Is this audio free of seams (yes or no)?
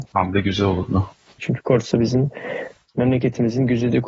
no